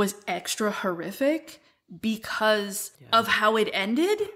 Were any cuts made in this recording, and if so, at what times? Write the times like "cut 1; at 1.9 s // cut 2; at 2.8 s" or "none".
none